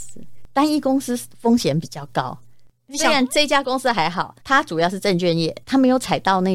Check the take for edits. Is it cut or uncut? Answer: cut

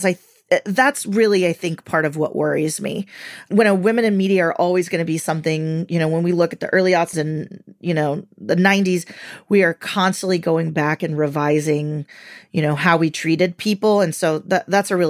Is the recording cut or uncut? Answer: cut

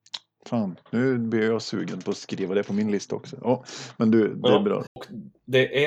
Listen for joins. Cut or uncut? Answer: cut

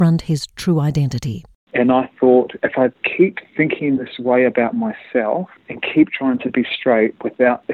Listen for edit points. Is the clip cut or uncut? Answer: cut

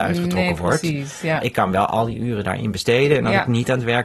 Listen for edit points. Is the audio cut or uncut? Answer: uncut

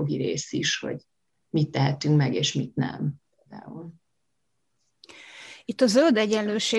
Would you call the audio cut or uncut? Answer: uncut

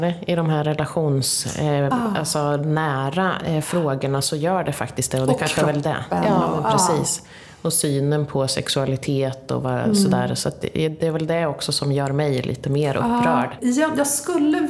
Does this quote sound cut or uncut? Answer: cut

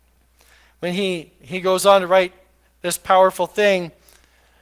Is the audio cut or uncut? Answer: uncut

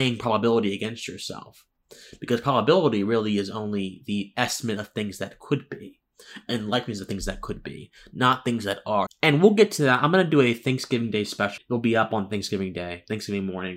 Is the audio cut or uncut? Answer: cut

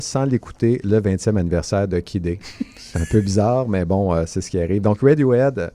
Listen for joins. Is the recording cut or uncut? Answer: uncut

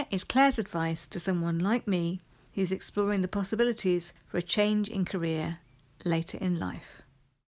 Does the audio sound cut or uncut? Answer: uncut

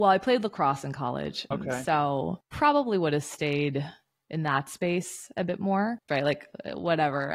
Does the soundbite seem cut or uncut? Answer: cut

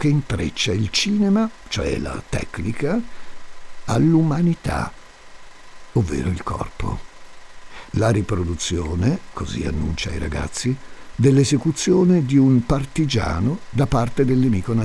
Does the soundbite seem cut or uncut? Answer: uncut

